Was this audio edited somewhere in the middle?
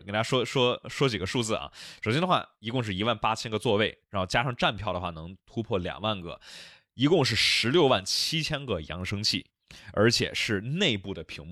no; 0 cuts

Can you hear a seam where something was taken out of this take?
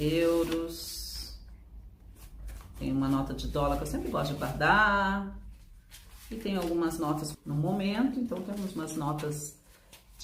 yes; 1 cut; at 7.3 s

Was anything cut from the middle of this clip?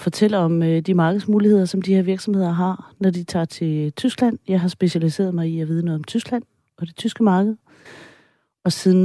no; 0 cuts

